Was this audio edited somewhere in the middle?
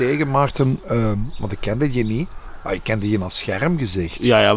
no; 0 cuts

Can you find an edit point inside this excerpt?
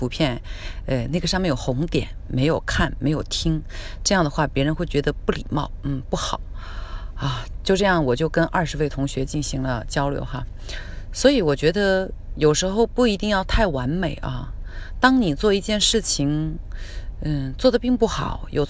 no; 0 cuts

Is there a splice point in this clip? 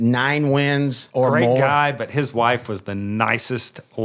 no; 0 cuts

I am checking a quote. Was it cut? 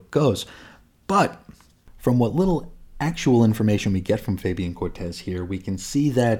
no; 0 cuts

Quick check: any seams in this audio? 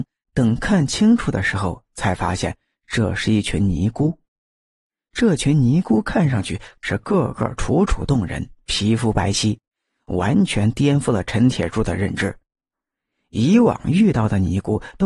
no; 0 cuts

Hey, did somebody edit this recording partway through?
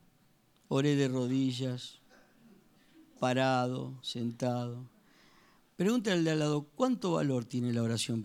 no; 0 cuts

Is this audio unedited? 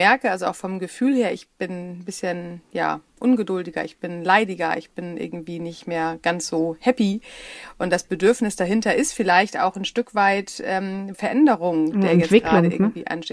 no; 1 cut; at 11.1 s

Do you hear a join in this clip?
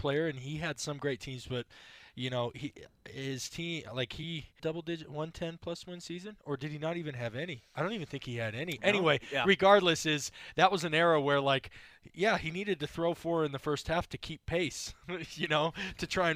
yes; 1 cut; at 4.6 s

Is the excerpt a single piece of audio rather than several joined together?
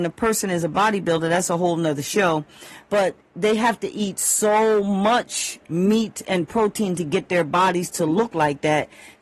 yes; 0 cuts

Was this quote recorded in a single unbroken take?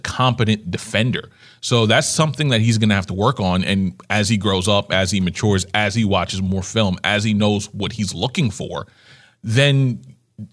yes; 0 cuts

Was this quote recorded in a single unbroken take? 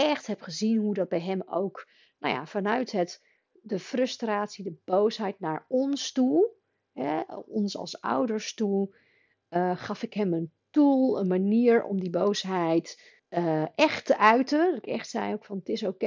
no; 1 cut; at 13.2 s

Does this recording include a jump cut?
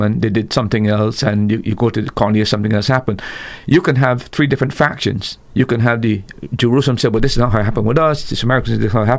no; 0 cuts

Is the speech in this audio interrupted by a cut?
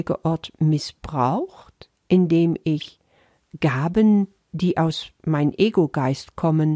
no; 0 cuts

